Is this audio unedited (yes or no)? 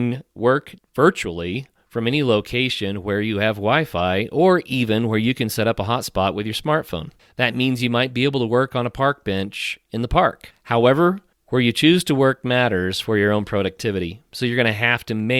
yes